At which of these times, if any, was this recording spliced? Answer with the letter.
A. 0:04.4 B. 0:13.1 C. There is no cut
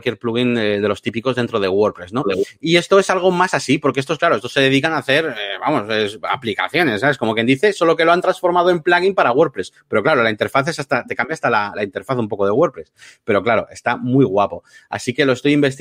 C